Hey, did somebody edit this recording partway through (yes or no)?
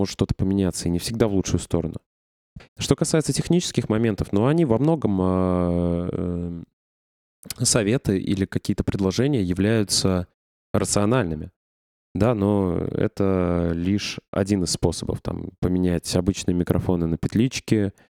yes